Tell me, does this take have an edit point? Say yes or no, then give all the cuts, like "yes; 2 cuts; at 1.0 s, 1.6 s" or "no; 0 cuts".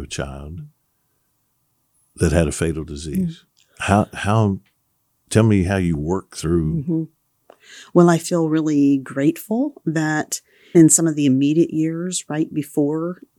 yes; 1 cut; at 10.7 s